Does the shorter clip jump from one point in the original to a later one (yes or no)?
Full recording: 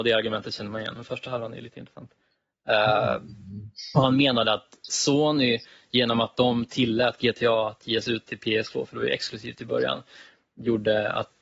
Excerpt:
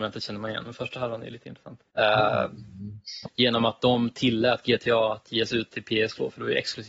yes